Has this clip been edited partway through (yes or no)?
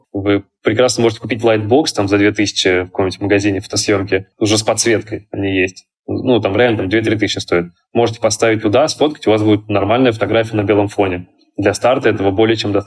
no